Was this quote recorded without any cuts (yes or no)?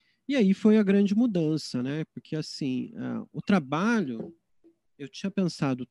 yes